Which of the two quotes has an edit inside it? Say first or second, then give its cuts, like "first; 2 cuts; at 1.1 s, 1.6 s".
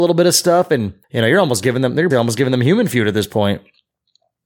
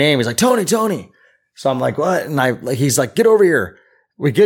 first; 2 cuts; at 1.0 s, 2.1 s